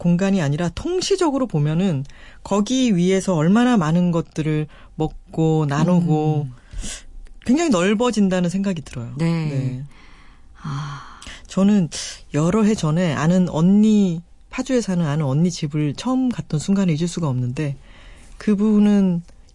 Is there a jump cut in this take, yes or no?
no